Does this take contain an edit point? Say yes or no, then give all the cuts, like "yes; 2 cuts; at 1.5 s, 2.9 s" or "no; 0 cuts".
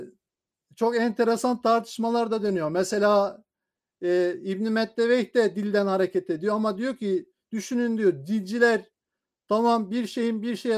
no; 0 cuts